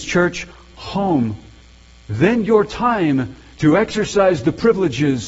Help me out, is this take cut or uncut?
uncut